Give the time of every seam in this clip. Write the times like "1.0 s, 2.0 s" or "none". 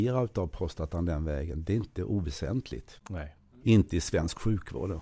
3.6 s